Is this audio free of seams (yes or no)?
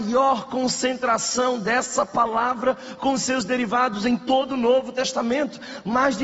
yes